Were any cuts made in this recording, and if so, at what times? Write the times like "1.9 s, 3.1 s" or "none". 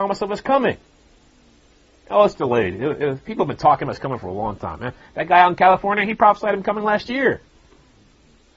none